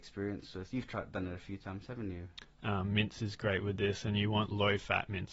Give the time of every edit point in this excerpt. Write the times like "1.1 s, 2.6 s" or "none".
2.4 s